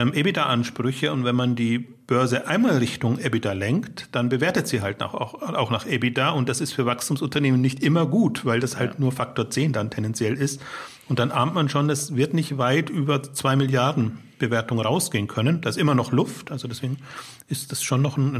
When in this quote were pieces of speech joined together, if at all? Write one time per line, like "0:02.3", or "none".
none

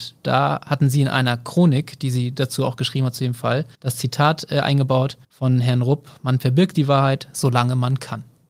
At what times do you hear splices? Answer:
0:03.7
0:05.2

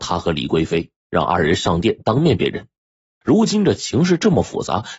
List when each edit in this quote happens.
0:03.2

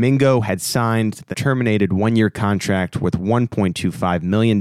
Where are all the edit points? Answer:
0:01.3

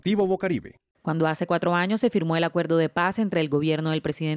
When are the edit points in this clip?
0:00.9

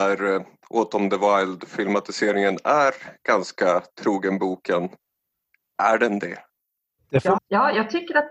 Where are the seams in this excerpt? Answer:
0:07.4

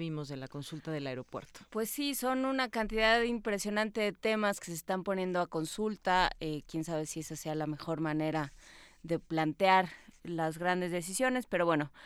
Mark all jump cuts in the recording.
0:09.2

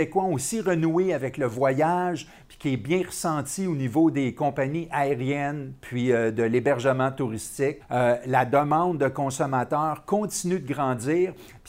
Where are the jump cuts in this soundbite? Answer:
0:07.8

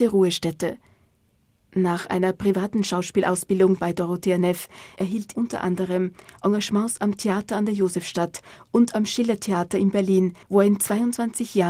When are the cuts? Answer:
0:05.3
0:10.4

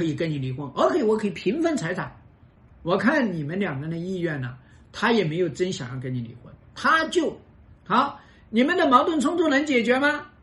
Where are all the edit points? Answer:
0:02.7
0:07.7

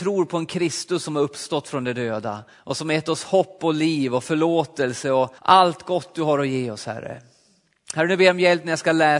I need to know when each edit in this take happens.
0:02.5
0:05.4

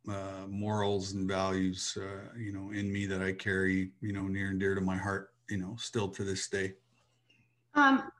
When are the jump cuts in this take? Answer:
none

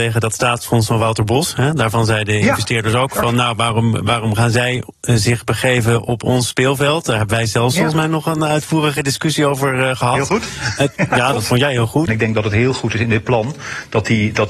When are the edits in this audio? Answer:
0:12.1

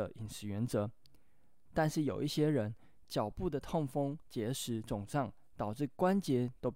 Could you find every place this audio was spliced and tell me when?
0:01.7

